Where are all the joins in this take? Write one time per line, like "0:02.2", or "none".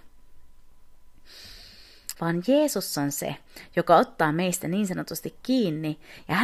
0:02.1